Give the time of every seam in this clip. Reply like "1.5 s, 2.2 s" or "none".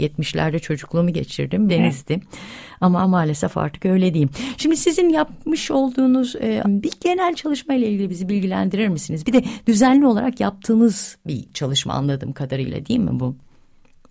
1.7 s, 6.6 s